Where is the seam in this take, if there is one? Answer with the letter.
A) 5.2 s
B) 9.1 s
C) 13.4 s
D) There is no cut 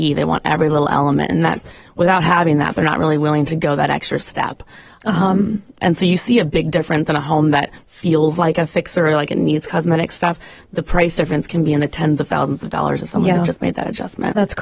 D